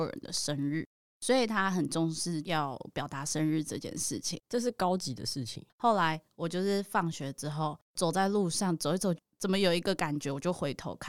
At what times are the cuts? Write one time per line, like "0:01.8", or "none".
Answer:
0:04.4
0:05.7
0:09.2